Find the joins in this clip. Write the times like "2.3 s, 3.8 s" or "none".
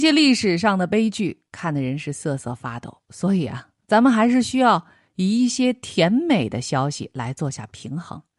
none